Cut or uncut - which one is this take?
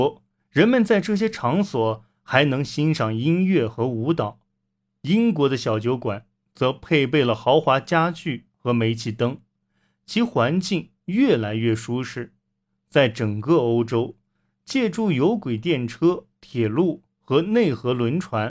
uncut